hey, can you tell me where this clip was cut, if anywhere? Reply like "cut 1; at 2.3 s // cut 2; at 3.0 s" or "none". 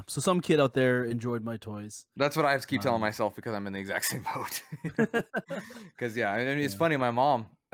none